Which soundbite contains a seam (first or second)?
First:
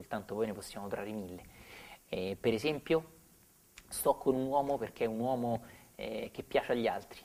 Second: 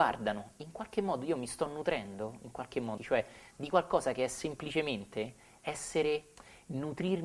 second